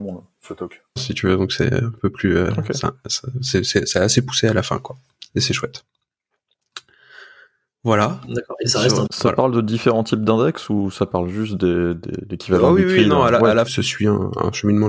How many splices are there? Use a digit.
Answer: 3